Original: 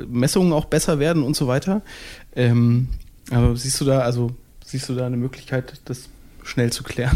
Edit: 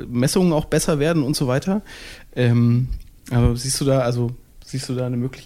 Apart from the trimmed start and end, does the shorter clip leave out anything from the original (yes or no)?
no